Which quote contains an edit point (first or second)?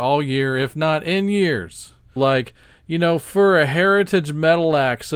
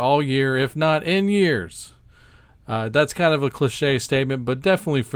first